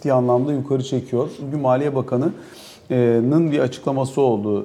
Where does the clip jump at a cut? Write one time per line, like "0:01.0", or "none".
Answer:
0:01.4